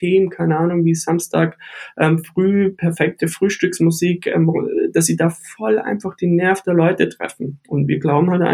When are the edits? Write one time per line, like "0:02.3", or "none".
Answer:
none